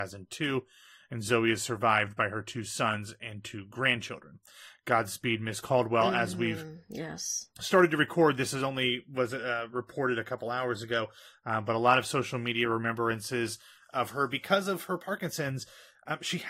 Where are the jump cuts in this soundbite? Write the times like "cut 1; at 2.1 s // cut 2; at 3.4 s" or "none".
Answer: none